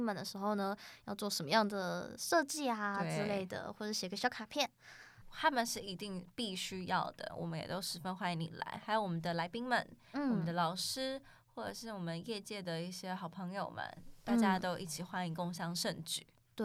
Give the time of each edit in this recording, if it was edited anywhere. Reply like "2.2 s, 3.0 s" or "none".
5.2 s, 7.3 s